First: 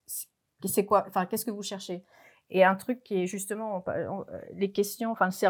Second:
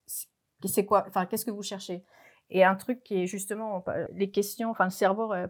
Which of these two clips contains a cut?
second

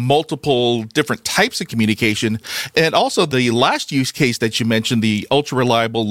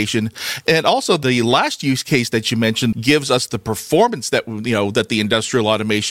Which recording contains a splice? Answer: second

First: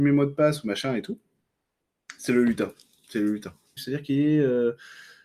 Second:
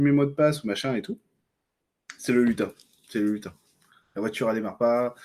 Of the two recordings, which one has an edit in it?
first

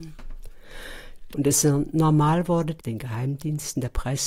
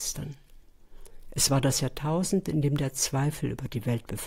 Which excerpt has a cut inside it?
first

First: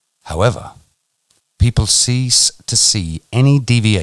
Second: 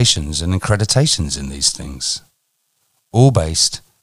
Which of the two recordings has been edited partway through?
first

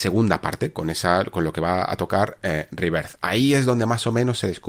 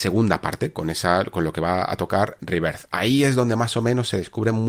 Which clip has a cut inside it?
second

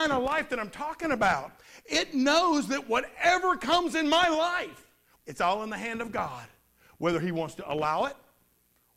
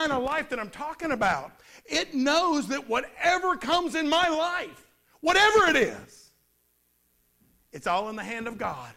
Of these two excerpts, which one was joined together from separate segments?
first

